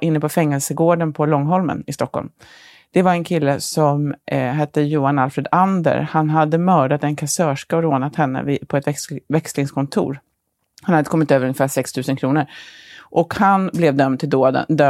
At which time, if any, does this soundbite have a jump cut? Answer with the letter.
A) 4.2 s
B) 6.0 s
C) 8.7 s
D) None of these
D